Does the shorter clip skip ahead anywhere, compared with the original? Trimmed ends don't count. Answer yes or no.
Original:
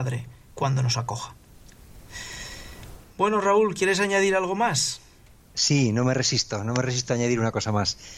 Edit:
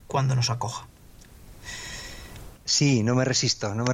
yes